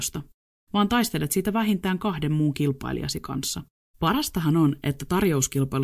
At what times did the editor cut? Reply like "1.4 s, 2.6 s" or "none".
3.8 s